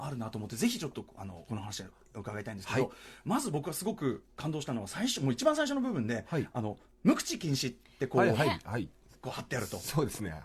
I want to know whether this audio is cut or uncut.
uncut